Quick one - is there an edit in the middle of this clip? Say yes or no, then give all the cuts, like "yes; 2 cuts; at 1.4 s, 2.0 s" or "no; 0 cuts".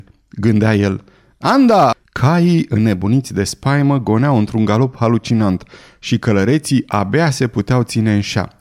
yes; 1 cut; at 1.9 s